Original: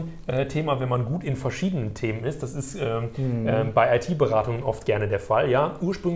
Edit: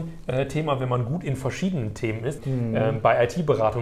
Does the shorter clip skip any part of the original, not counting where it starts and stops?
yes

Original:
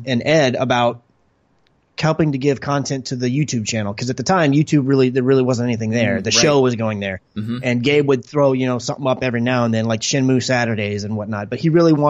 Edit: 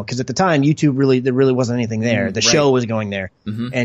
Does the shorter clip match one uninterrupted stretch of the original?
yes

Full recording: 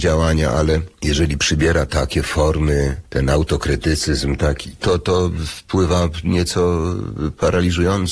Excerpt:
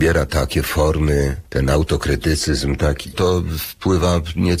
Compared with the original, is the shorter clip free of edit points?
no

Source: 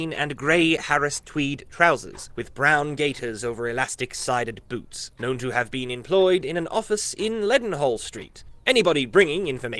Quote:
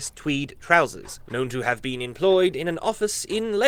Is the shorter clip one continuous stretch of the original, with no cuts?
no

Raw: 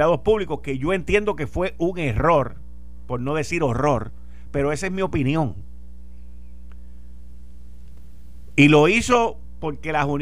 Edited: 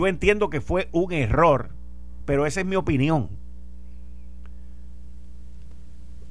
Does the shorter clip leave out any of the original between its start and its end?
yes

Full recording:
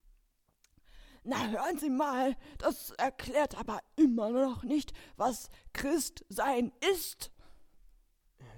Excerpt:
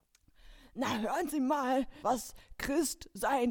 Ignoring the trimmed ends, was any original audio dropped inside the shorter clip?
yes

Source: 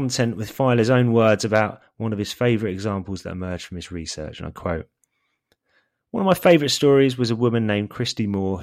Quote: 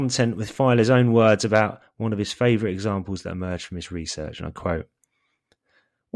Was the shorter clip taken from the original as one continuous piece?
yes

